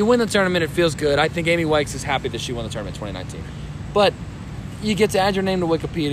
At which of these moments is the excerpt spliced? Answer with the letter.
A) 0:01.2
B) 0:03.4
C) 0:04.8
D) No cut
B